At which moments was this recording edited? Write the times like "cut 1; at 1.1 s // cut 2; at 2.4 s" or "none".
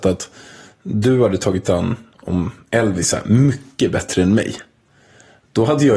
none